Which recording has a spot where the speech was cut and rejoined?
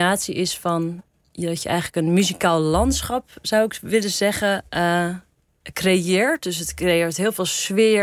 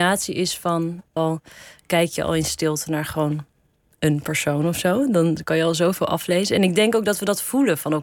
second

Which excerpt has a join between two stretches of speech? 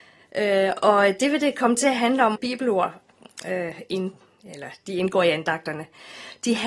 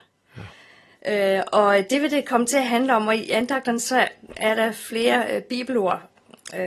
first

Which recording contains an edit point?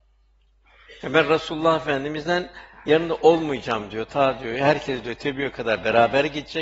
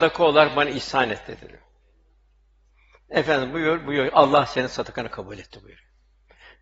first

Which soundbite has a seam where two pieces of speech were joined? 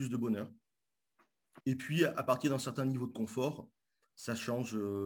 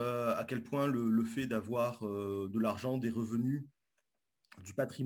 first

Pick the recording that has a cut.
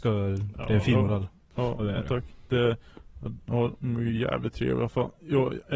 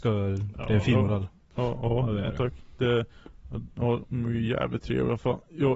first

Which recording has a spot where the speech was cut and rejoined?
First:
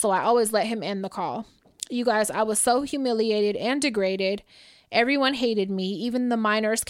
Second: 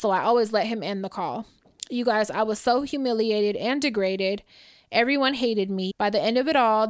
second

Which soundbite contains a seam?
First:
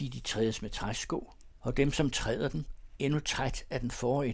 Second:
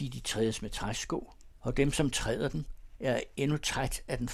first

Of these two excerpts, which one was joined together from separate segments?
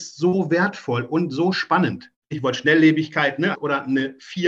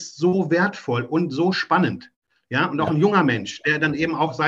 first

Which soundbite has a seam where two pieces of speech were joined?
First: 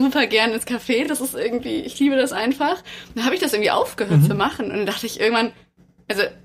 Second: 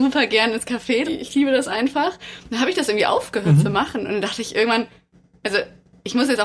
second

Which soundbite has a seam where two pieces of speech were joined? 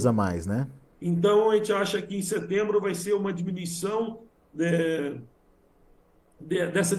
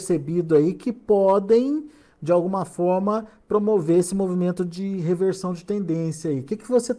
first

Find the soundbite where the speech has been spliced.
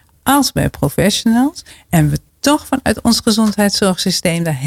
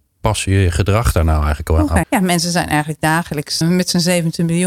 second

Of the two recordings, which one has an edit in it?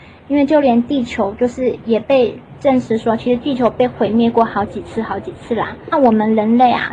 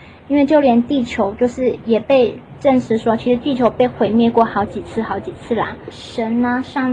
second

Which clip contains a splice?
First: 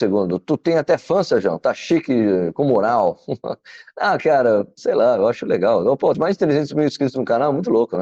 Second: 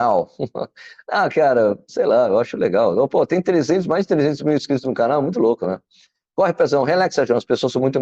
first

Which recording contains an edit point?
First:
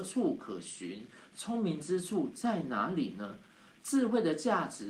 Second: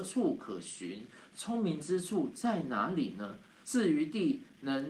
second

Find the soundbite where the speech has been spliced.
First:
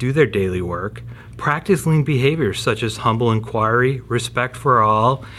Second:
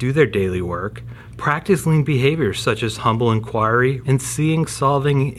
second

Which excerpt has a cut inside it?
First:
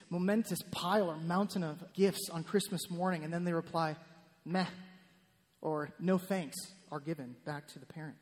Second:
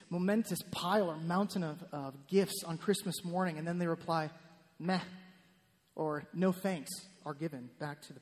first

